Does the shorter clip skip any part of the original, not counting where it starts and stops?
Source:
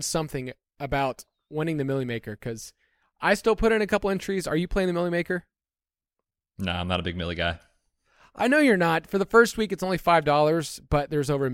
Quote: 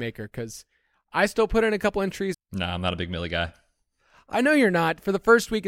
yes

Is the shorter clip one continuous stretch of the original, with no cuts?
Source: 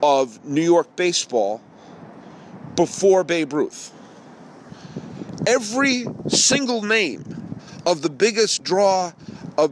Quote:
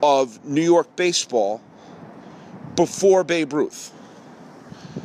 yes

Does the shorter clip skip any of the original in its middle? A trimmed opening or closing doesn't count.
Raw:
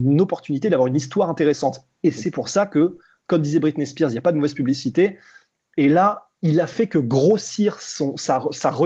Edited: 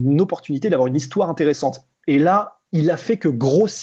yes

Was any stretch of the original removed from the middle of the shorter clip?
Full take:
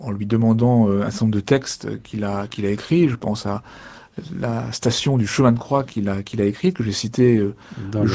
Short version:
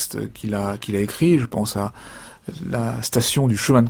no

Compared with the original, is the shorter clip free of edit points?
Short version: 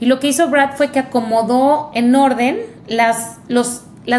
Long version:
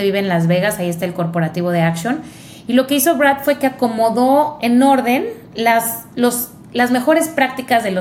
yes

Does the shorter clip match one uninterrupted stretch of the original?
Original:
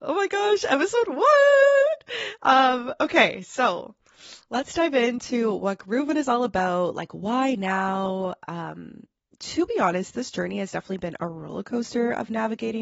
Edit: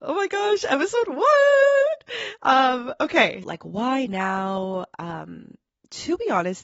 no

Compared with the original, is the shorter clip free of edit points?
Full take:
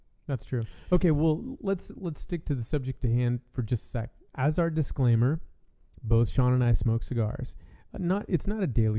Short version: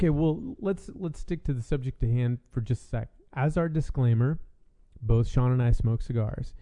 yes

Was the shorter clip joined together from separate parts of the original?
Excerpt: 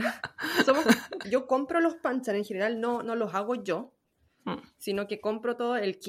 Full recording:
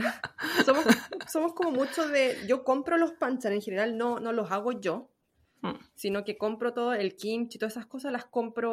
yes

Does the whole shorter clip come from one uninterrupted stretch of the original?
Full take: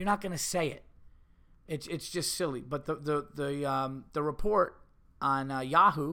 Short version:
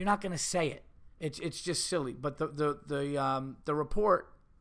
no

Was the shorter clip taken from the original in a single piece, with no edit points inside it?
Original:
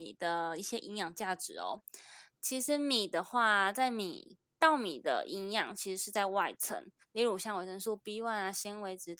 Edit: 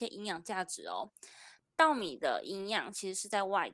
no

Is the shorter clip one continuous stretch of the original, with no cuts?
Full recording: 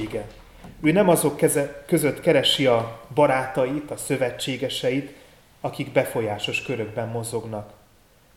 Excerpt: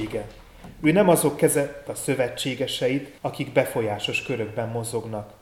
no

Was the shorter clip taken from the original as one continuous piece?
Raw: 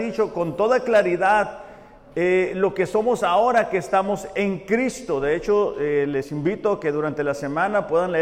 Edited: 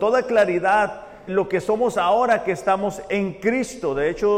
no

